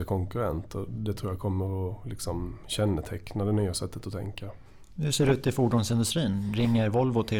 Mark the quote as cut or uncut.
uncut